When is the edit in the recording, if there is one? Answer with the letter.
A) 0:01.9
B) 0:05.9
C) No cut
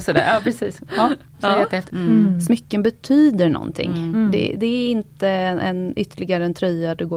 A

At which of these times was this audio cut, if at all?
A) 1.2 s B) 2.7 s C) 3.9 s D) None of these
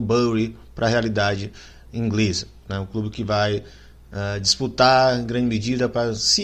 D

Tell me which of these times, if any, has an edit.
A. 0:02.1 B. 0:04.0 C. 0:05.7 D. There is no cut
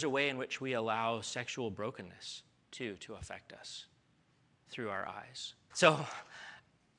C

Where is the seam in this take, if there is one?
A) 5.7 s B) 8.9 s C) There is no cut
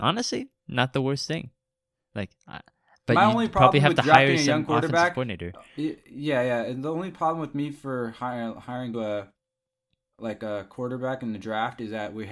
B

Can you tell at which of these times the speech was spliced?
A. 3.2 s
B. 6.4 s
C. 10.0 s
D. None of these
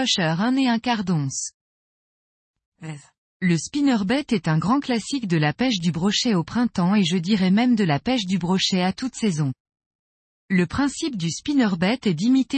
D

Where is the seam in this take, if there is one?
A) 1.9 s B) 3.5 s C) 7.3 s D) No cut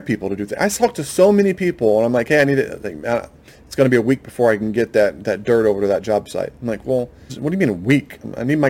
C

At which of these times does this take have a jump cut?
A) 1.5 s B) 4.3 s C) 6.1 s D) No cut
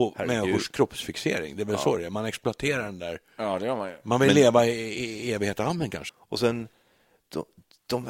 C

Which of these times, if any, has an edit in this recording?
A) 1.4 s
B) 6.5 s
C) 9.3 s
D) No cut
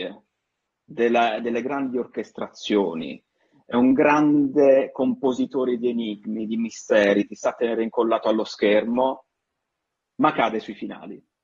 D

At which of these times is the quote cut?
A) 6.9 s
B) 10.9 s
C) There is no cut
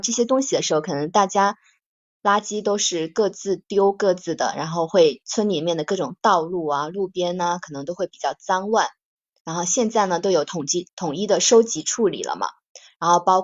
B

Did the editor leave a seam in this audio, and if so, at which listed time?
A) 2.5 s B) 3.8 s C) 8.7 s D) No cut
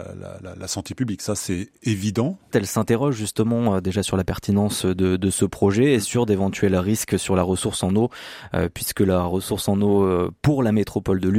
A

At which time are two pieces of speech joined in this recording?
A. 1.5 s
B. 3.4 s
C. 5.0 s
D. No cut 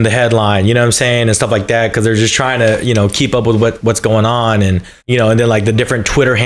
C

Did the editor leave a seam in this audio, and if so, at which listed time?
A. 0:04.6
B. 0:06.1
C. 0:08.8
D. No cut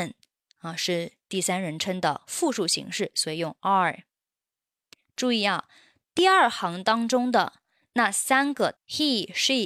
C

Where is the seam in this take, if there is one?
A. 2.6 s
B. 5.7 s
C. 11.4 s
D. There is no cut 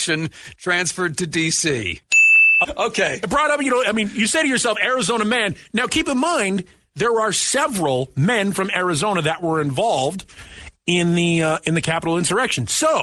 A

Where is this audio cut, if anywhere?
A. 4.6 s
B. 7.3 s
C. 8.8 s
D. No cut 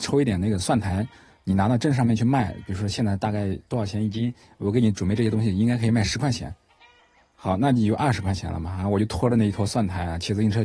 D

